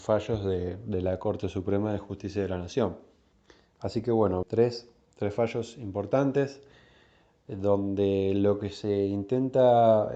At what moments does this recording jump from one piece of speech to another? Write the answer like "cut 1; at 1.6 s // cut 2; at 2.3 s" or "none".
cut 1; at 4.4 s